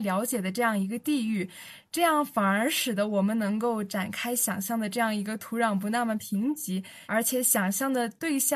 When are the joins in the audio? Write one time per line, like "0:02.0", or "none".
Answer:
0:07.1